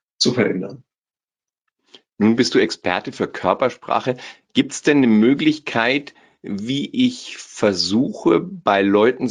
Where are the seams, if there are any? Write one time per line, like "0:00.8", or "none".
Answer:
none